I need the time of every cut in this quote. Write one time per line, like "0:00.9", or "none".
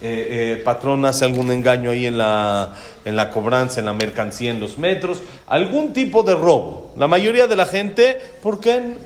none